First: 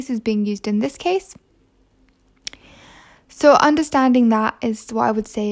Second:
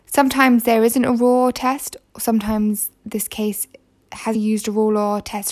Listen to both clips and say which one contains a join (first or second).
second